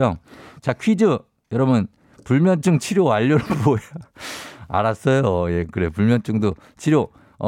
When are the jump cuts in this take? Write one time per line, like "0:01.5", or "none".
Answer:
none